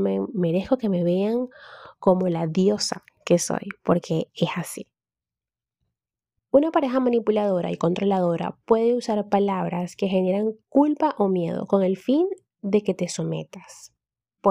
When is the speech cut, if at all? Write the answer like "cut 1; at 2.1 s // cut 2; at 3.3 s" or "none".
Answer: cut 1; at 6.4 s